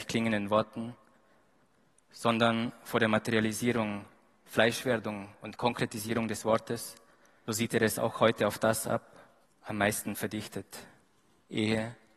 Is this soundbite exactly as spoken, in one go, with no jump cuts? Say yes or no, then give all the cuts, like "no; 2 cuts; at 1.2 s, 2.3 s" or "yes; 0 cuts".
no; 2 cuts; at 7.5 s, 9.4 s